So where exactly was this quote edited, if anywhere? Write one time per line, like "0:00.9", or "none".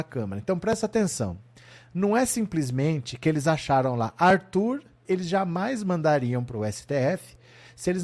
0:05.0